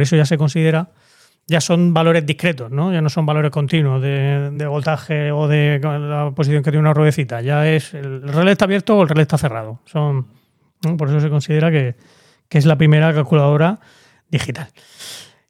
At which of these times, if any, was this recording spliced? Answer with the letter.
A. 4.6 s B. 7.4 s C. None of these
A